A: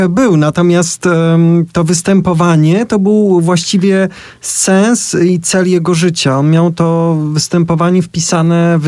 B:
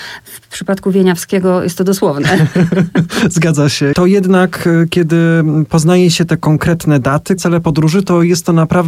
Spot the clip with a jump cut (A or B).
B